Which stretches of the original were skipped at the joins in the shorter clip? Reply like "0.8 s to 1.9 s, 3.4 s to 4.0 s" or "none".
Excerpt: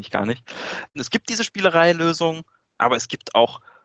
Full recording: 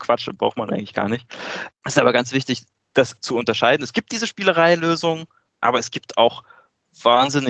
1.8 s to 3.8 s